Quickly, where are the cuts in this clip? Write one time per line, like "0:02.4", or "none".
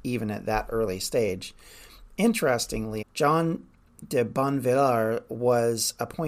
0:03.0